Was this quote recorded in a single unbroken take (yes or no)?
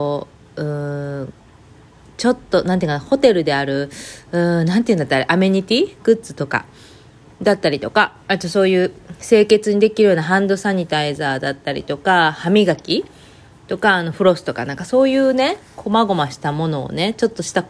yes